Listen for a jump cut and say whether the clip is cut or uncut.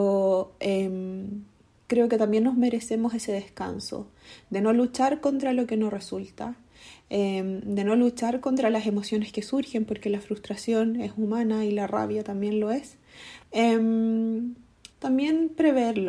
cut